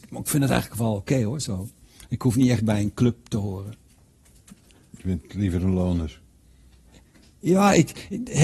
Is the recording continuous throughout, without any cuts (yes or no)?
yes